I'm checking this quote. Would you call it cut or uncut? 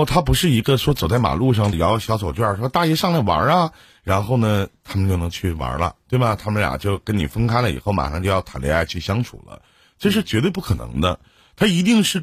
cut